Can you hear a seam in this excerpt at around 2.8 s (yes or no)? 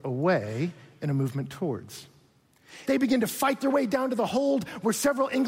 yes